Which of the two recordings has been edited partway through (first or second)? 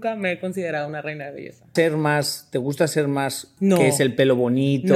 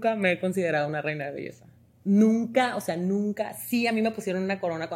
first